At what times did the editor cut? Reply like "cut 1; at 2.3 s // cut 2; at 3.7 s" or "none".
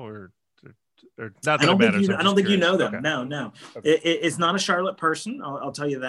none

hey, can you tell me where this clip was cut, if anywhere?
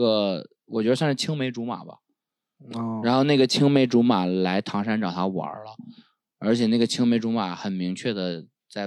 none

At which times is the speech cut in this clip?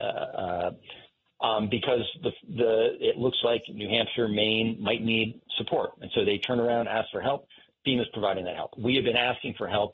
cut 1; at 1.3 s

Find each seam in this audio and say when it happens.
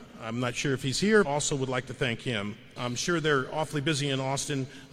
cut 1; at 1.2 s // cut 2; at 2.8 s

